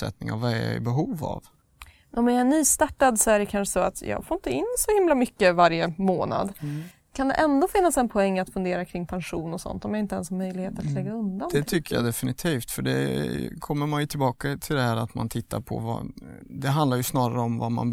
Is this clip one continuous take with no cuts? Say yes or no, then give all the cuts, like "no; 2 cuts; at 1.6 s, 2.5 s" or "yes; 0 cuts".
yes; 0 cuts